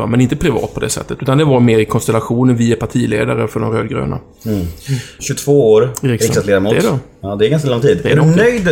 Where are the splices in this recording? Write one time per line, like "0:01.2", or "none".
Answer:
0:05.2